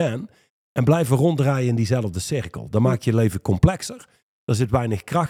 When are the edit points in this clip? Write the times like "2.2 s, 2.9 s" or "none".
none

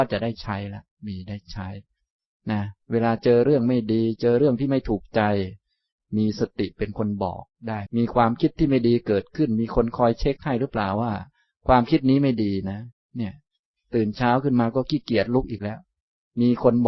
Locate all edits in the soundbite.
7.9 s

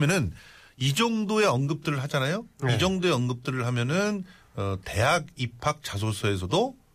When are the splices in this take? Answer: none

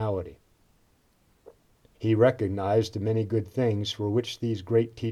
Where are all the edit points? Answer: 1.9 s

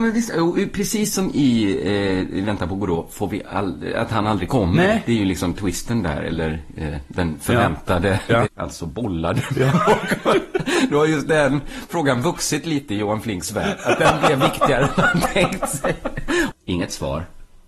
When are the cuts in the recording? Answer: 8.5 s, 16.5 s

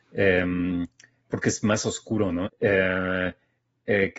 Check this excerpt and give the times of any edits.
2.4 s

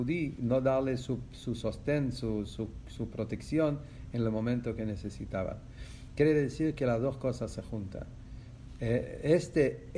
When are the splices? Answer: none

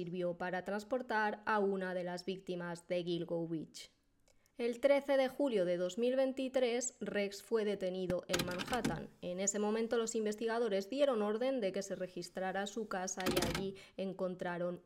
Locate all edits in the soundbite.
none

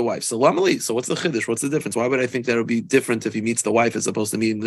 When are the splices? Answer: none

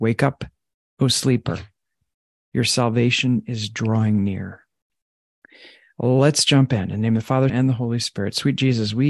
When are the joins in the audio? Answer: 7.5 s

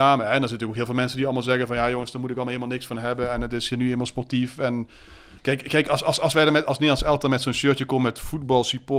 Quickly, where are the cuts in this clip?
5.4 s

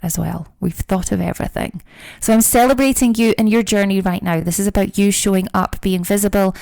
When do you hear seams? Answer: none

